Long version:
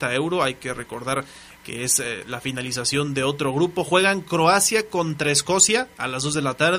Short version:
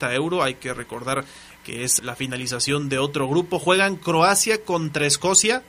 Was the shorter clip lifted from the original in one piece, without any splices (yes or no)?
no